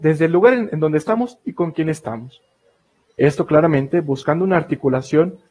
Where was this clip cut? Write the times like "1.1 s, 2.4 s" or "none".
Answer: none